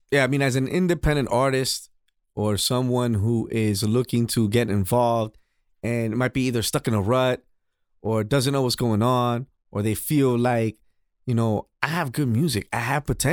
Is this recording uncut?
yes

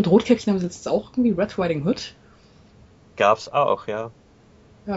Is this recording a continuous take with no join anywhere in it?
yes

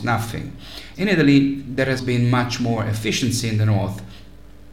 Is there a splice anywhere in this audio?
yes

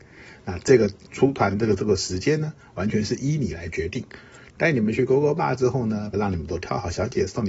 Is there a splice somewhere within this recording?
yes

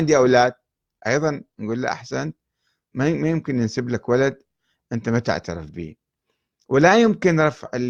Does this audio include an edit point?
no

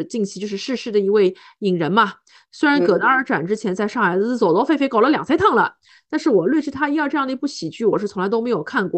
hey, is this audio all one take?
yes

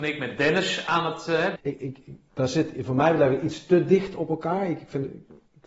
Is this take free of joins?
no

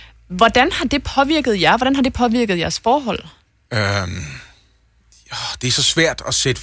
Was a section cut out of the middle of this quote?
no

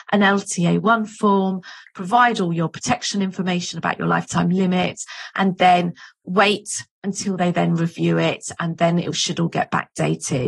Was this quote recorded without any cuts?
yes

